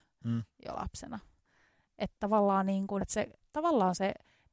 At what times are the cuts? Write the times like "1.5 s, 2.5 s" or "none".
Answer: 3.0 s